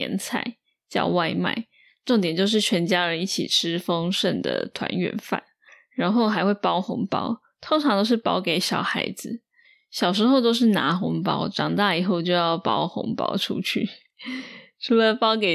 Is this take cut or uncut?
uncut